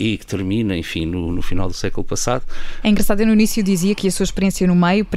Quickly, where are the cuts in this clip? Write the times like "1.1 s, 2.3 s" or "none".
2.8 s, 4.0 s